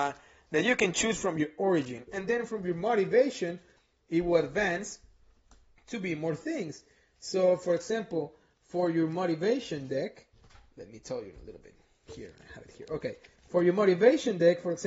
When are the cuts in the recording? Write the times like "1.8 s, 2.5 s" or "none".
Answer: none

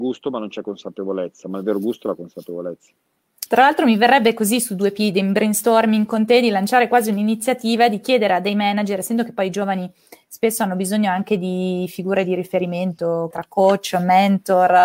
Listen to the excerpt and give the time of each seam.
3.5 s, 13.3 s

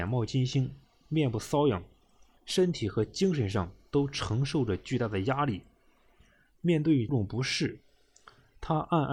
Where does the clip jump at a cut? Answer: 2.4 s, 7.1 s

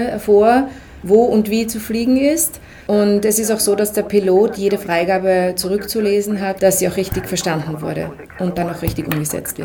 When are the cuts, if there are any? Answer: 2.8 s, 6.6 s

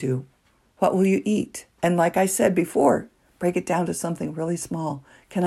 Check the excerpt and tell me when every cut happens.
1.7 s

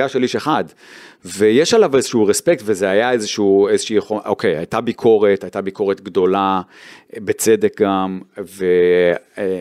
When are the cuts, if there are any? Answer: none

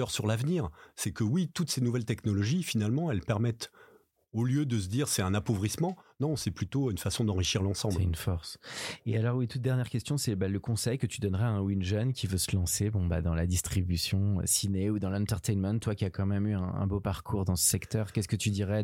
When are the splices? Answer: none

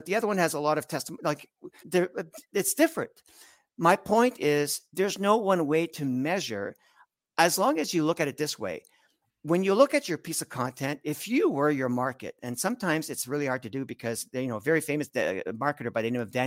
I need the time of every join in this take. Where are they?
1.8 s

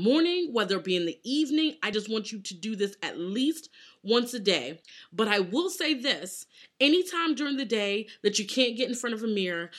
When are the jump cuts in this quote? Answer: none

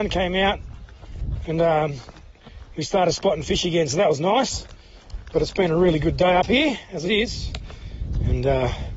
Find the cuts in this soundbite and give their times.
5.3 s, 7.0 s

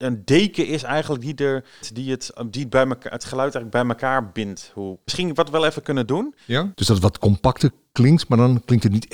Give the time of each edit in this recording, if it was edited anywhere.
1.8 s, 5.1 s, 6.7 s

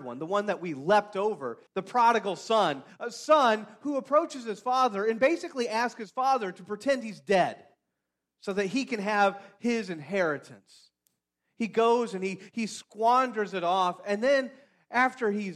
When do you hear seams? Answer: 1.7 s, 2.9 s

